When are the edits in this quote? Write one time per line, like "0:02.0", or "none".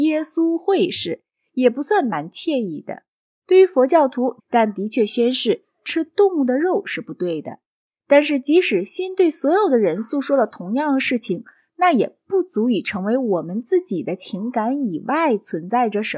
0:04.4